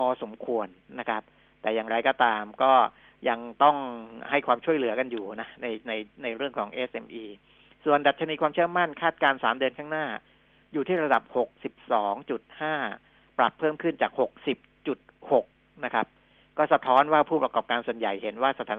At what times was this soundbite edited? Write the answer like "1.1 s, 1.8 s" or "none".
none